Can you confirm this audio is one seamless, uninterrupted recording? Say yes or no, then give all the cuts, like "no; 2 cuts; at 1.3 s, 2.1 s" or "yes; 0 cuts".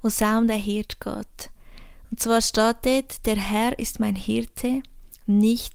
yes; 0 cuts